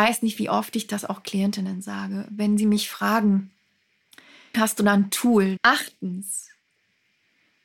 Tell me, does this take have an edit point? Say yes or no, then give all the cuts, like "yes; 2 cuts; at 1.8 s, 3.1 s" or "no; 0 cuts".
yes; 2 cuts; at 4.5 s, 5.6 s